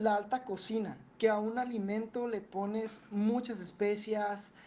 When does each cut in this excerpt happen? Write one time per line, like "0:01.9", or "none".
0:01.1